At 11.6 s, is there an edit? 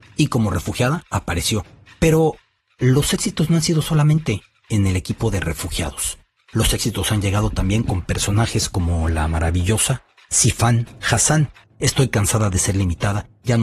yes; 1 cut; at 11.6 s

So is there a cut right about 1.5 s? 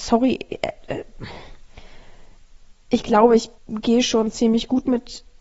no; 1 cut; at 3.6 s

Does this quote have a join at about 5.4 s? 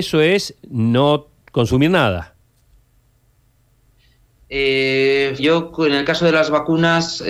yes; 1 cut; at 5.4 s

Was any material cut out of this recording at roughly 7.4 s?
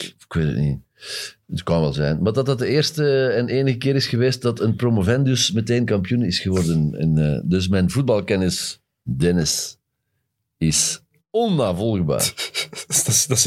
no; 0 cuts

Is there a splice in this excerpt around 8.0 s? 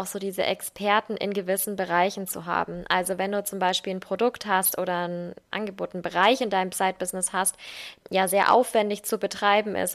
yes; 1 cut; at 8.0 s

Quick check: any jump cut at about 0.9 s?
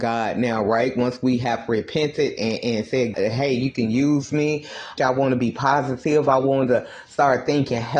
no; 2 cuts; at 3.1 s, 5.0 s

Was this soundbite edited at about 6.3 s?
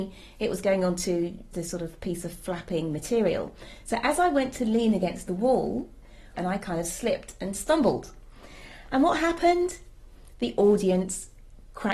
yes; 2 cuts; at 1.5 s, 6.3 s

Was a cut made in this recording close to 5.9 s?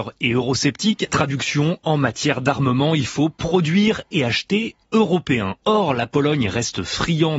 no; 1 cut; at 1.1 s

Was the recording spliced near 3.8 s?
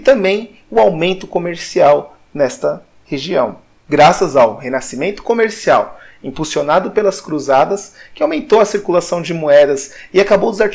yes; 1 cut; at 3.8 s

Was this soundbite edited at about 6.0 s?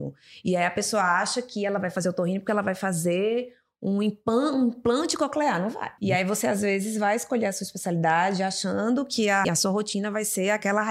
yes; 2 cuts; at 6.0 s, 9.4 s

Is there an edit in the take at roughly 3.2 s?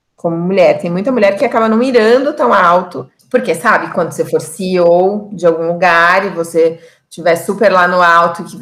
yes; 1 cut; at 3.2 s

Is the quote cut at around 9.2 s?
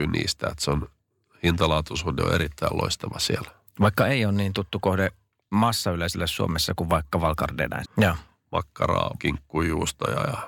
yes; 2 cuts; at 7.8 s, 9.2 s

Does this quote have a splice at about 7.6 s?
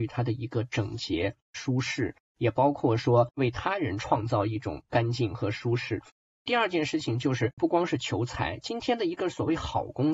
yes; 1 cut; at 7.6 s

